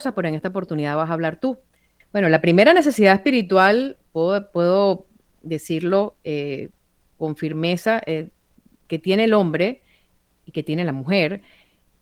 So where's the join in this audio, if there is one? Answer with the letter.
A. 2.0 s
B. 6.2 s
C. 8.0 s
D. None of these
A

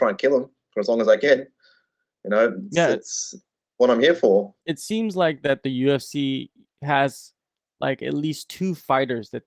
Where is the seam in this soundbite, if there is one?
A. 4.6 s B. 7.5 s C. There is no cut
A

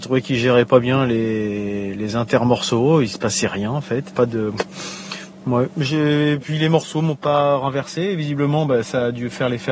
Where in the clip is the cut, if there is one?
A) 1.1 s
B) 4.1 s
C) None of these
B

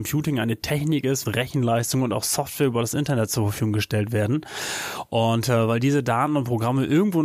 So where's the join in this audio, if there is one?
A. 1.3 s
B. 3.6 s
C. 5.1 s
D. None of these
A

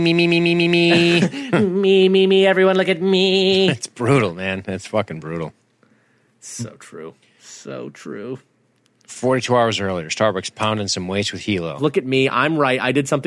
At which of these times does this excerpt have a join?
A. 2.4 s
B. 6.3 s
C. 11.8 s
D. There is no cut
C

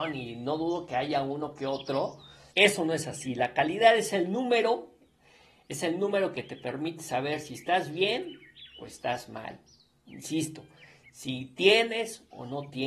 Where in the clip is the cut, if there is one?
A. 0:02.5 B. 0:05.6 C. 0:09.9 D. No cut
A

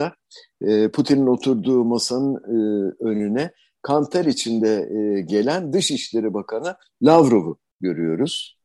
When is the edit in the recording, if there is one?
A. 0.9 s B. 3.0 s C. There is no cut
C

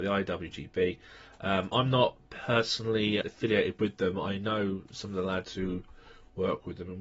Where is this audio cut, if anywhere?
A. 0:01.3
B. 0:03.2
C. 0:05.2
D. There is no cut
B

